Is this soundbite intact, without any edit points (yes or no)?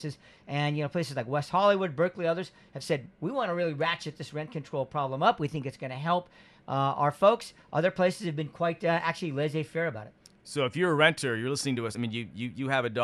yes